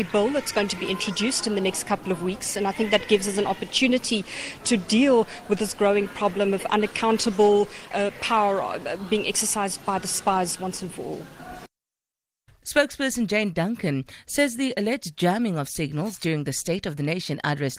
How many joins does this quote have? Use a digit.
2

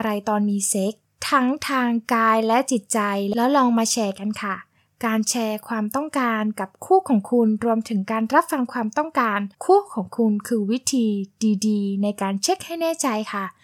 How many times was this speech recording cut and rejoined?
1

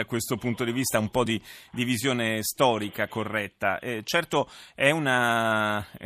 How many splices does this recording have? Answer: 0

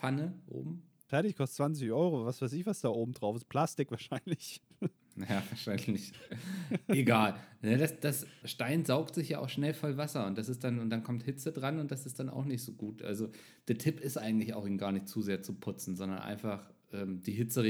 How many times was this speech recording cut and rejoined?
2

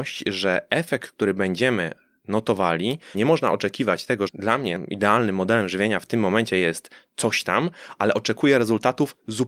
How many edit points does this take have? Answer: 2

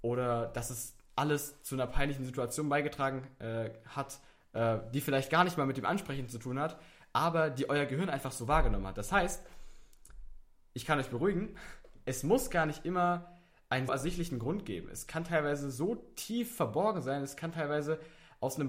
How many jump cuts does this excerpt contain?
1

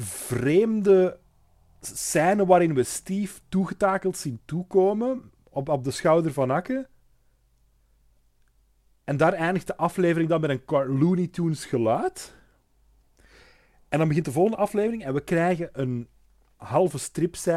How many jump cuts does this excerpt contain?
0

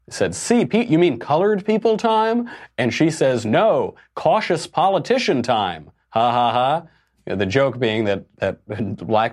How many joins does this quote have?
1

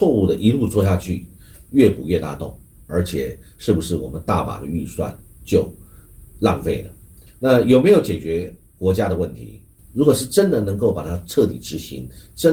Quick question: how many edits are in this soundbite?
2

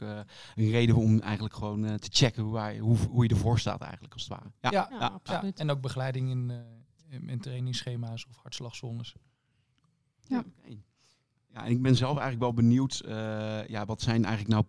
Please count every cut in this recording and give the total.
0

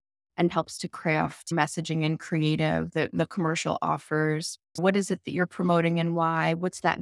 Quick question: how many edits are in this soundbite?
1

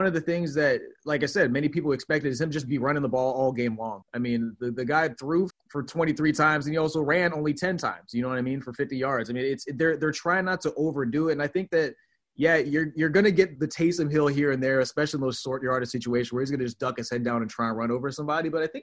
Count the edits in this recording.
3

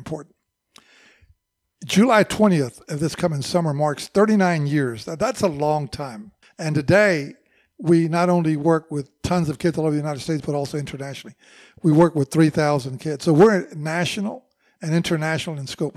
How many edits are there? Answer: 1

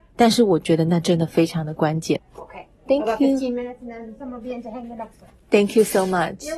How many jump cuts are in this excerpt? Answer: 1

